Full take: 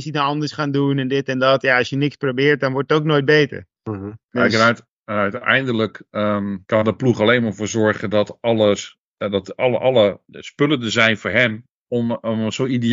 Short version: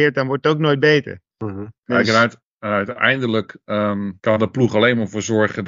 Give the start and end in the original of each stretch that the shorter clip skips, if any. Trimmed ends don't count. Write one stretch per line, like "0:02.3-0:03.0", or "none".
none

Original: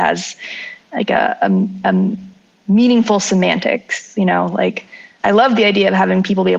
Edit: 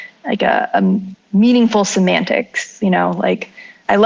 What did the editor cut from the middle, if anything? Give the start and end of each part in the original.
0:01.8-0:02.5

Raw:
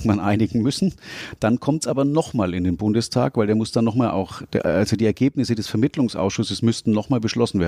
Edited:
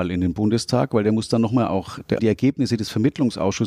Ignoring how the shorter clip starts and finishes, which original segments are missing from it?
0:04.6-0:05.0

